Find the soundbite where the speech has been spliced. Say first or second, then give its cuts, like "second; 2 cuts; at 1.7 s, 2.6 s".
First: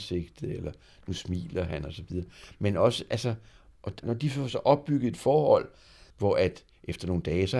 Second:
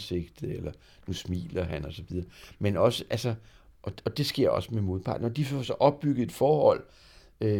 first; 2 cuts; at 4.0 s, 6.1 s